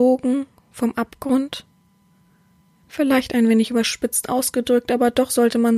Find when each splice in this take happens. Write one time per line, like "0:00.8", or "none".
none